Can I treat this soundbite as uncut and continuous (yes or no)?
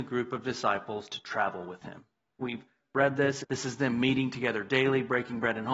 no